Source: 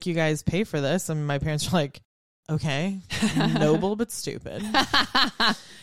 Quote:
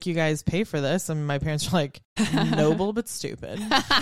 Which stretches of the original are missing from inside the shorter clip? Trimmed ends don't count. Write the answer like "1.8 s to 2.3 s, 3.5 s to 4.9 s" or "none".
2.2 s to 3.2 s